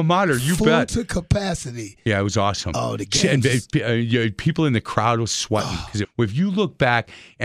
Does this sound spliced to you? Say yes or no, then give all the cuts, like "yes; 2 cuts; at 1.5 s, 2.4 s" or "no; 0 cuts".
yes; 1 cut; at 6.0 s